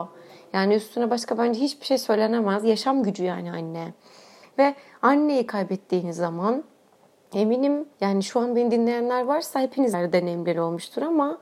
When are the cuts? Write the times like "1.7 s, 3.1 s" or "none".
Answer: 7.9 s, 9.9 s